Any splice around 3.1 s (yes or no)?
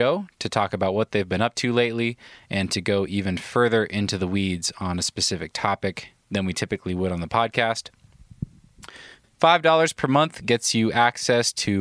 no